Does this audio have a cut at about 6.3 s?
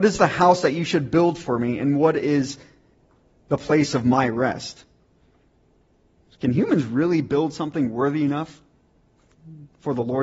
no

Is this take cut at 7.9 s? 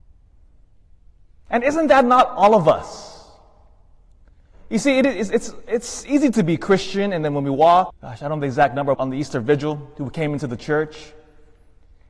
yes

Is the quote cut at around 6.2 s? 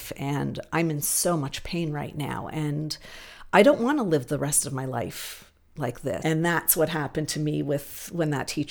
yes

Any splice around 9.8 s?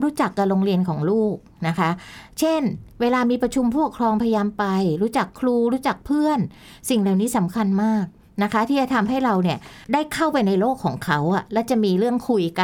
yes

